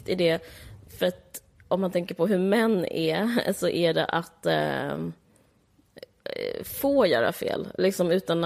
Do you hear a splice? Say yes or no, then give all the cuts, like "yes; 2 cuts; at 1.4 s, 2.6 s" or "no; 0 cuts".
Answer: no; 0 cuts